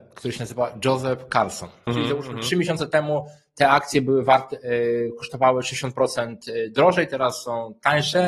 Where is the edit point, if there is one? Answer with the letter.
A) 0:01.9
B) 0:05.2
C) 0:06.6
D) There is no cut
A